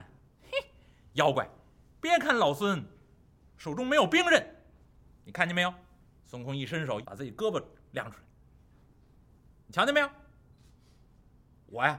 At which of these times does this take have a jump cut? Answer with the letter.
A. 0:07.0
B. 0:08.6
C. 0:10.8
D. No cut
A